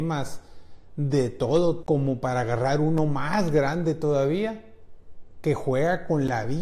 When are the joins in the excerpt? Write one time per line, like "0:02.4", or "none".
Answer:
0:01.8